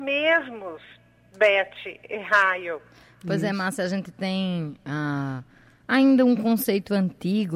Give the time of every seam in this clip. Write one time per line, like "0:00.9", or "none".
none